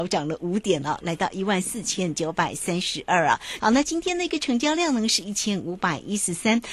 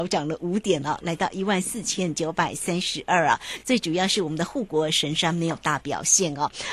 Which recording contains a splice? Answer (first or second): first